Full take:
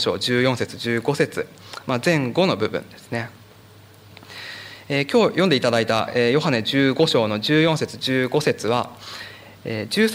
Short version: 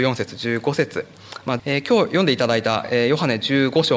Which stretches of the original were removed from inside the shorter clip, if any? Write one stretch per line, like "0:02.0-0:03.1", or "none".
0:02.0-0:04.8